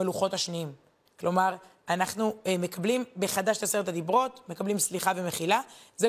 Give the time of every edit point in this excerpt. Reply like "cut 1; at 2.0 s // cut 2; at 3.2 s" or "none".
cut 1; at 1.1 s